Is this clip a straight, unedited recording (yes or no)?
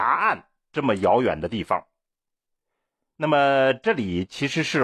yes